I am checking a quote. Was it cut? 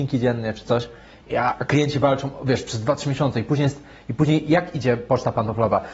no; 0 cuts

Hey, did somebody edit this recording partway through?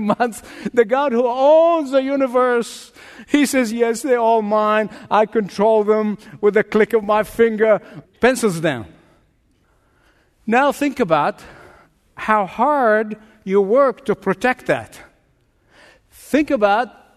yes; 2 cuts; at 3.7 s, 8.0 s

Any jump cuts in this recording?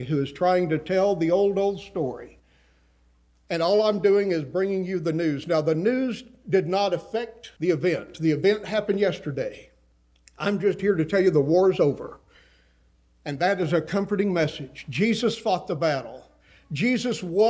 no; 0 cuts

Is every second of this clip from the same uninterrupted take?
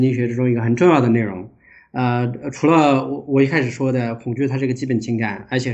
no; 1 cut; at 1.8 s

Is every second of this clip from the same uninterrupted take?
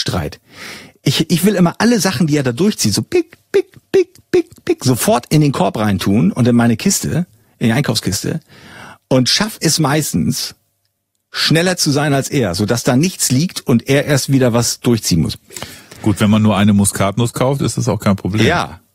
yes; 0 cuts

